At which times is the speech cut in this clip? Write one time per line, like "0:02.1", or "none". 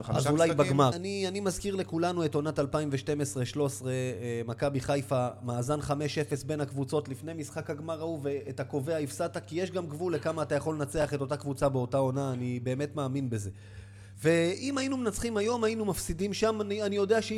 0:00.9
0:14.1